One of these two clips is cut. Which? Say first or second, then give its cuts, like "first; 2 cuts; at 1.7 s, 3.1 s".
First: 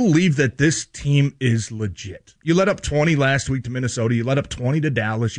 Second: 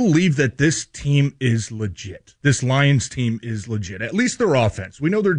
first; 1 cut; at 2.4 s